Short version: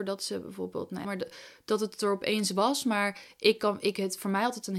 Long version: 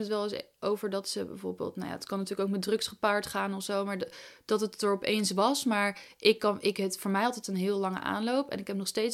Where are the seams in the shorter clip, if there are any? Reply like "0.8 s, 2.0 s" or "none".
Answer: 1.0 s